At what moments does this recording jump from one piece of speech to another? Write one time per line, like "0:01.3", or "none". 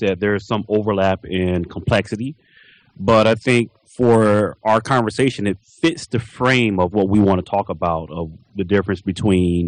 0:06.9